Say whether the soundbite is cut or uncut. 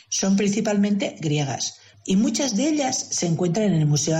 cut